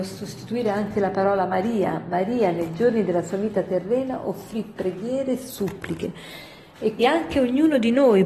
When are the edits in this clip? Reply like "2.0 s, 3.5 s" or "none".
7.0 s